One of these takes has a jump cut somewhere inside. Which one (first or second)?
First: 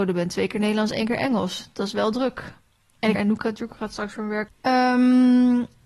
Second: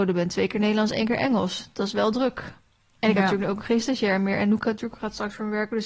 first